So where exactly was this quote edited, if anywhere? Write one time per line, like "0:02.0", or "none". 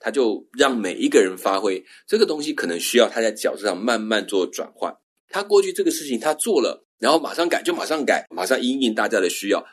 0:05.2
0:08.3